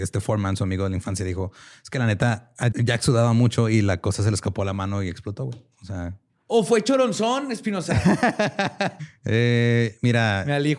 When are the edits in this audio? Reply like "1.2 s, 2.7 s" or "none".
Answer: 2.7 s, 9.0 s